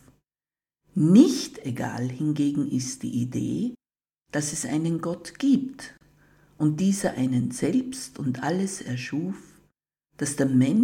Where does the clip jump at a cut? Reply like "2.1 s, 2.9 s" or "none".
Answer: none